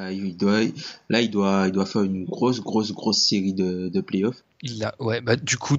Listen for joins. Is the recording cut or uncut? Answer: cut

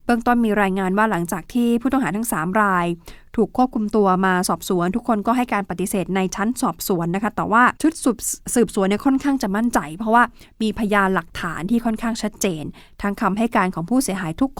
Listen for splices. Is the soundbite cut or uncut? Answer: cut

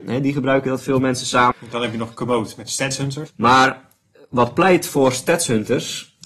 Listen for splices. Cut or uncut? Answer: cut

